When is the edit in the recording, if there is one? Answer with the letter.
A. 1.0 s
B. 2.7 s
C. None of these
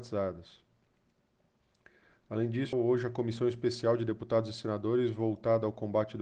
B